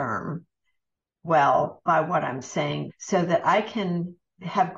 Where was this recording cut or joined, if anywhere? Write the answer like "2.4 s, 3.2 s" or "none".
2.9 s